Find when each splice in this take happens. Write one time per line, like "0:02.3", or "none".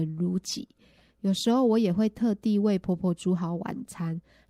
none